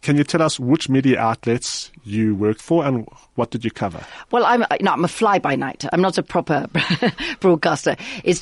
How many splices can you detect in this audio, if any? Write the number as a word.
one